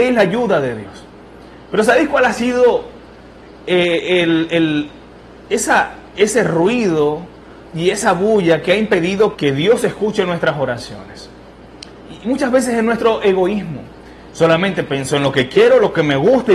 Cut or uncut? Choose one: cut